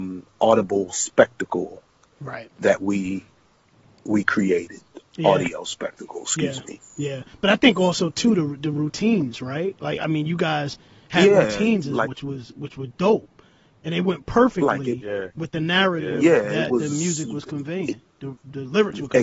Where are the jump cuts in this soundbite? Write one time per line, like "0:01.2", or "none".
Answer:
0:12.1